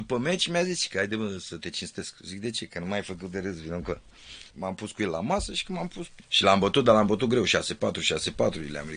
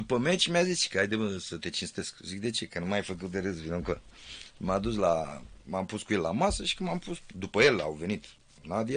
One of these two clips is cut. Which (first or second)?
first